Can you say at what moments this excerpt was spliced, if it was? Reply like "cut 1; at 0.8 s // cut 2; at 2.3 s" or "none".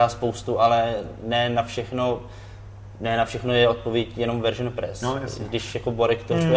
none

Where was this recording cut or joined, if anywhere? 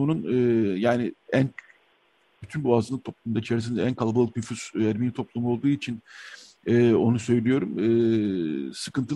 none

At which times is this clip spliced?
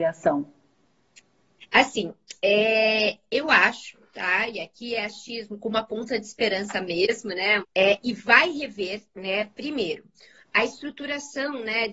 cut 1; at 7.6 s

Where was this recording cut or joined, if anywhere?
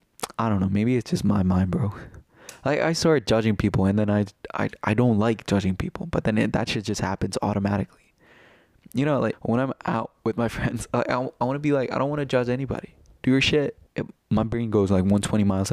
cut 1; at 9.3 s // cut 2; at 13.9 s

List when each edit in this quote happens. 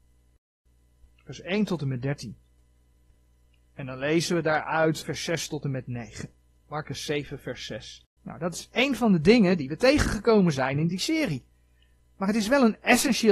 cut 1; at 6.6 s // cut 2; at 8.2 s

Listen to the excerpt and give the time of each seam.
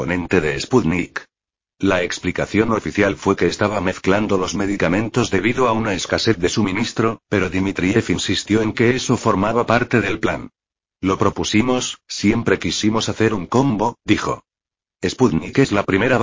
none

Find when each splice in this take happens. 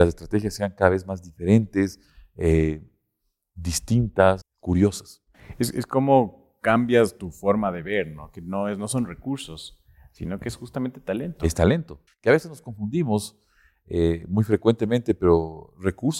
cut 1; at 4.4 s // cut 2; at 12.1 s

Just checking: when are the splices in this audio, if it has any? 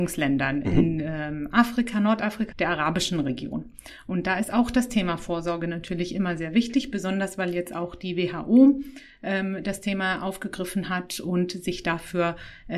cut 1; at 2.5 s

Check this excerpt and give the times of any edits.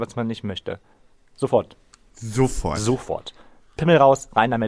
none

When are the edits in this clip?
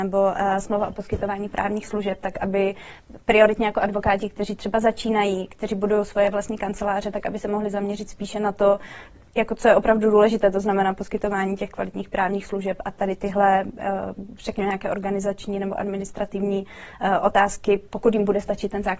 none

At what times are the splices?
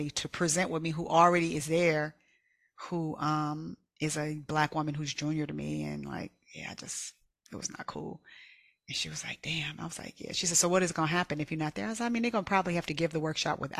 none

